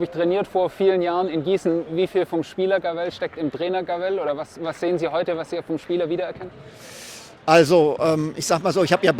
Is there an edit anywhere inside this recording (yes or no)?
yes